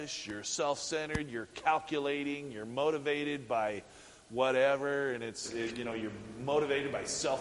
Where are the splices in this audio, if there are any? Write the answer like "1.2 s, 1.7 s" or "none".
none